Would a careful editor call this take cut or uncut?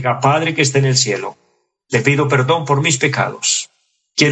uncut